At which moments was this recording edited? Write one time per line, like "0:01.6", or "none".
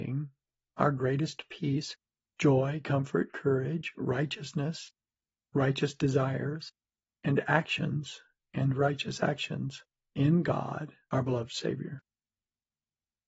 none